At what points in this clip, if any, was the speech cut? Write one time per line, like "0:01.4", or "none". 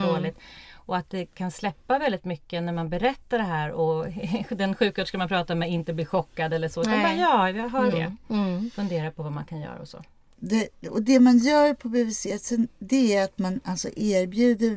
0:07.9